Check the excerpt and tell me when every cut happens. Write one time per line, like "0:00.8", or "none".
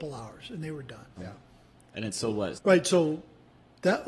0:01.2
0:02.5